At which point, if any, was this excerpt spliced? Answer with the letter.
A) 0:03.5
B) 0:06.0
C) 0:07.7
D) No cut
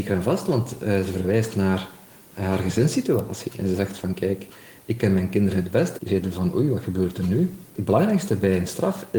B